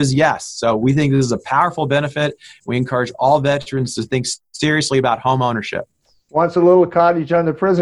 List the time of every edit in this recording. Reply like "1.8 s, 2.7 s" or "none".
none